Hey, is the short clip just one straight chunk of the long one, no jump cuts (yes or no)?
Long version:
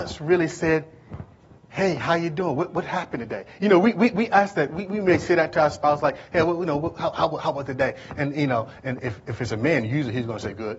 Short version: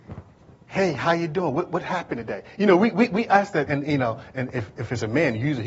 no